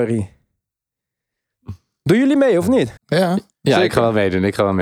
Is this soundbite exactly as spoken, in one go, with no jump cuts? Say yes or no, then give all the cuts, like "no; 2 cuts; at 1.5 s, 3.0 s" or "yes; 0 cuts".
no; 1 cut; at 3.0 s